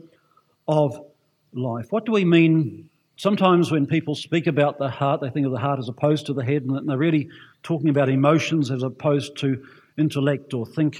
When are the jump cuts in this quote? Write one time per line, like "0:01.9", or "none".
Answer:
0:03.2